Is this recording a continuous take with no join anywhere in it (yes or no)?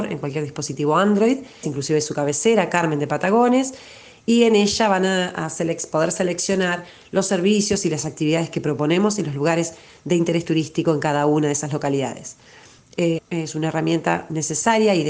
no